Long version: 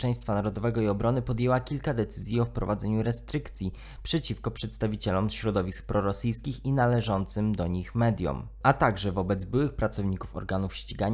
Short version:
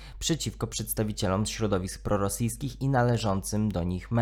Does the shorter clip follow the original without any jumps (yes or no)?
yes